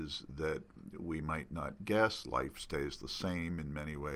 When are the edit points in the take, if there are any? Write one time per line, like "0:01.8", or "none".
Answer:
none

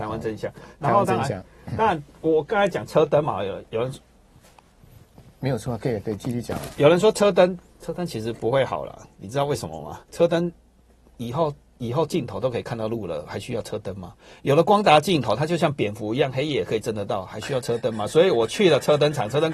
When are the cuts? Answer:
0:10.1

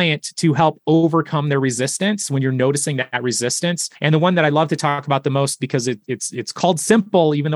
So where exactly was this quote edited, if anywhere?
0:04.0

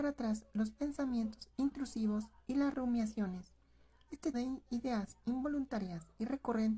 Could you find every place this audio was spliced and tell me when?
0:04.3

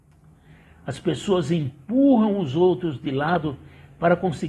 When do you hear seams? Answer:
none

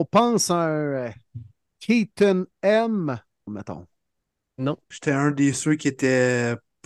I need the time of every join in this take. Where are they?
0:03.5
0:04.9

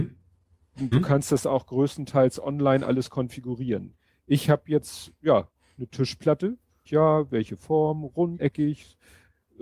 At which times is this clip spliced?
0:00.9
0:06.9
0:08.4

